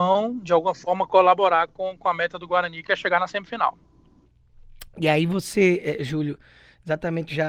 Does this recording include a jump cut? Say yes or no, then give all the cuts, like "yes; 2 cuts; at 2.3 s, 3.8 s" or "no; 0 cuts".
no; 0 cuts